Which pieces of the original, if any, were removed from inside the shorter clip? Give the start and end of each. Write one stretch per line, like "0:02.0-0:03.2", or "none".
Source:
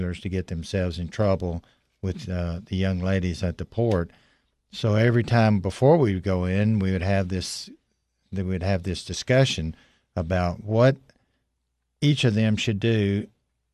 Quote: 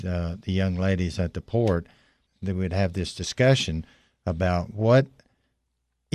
0:04.5-0:08.2